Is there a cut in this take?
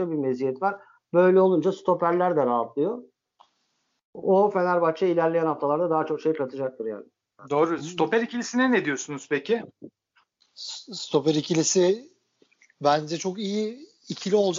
no; 0 cuts

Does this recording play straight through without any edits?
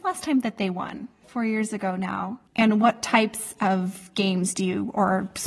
no; 2 cuts; at 1.2 s, 2.5 s

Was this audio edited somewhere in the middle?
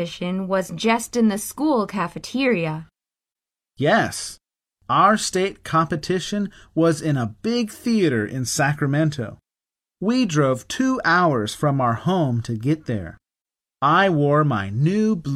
no; 0 cuts

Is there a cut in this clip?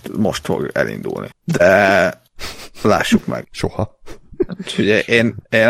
yes; 2 cuts; at 1.3 s, 3.4 s

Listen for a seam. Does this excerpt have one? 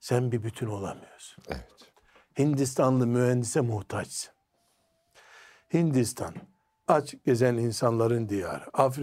no; 0 cuts

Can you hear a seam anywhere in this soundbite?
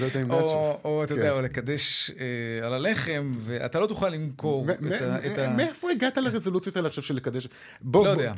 no; 0 cuts

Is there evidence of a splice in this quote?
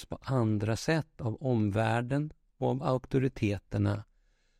no; 0 cuts

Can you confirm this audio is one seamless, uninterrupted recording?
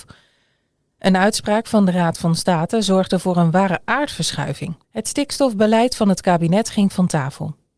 no; 1 cut; at 4.8 s

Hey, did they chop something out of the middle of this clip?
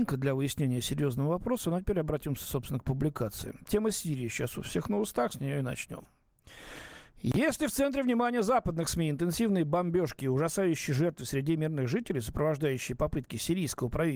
no; 0 cuts

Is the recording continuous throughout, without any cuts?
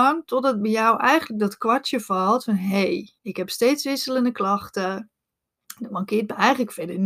no; 1 cut; at 3.2 s

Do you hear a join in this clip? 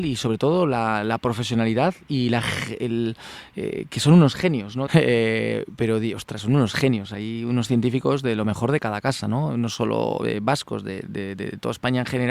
yes; 1 cut; at 4.9 s

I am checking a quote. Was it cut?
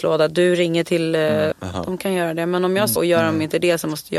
yes; 2 cuts; at 1.5 s, 3.0 s

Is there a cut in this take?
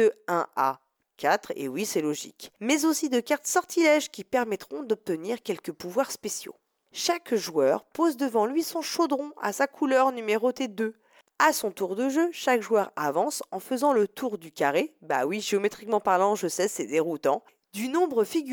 no; 0 cuts

